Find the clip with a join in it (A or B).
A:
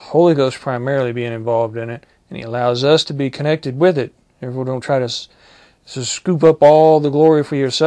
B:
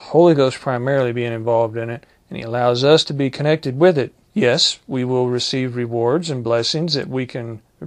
B